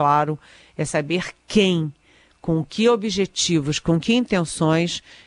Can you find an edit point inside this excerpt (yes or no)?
no